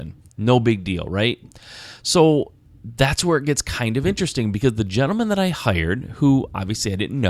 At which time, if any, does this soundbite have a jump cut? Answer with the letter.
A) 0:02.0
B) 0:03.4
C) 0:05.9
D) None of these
D